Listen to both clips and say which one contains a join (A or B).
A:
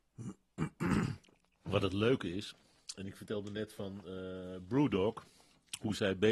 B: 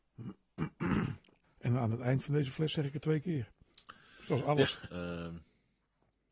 B